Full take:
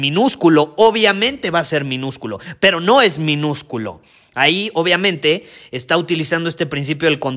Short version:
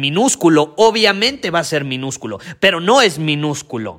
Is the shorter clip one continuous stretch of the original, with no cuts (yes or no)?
yes